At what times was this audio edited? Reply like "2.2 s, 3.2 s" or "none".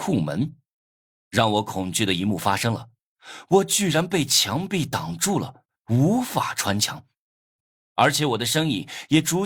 1.1 s